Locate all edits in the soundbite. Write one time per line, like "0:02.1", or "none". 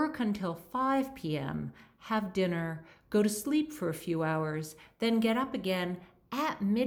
none